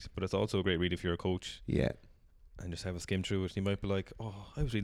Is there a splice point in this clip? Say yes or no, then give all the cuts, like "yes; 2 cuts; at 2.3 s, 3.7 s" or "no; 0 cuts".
no; 0 cuts